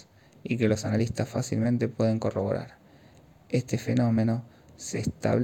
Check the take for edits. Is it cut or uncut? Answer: uncut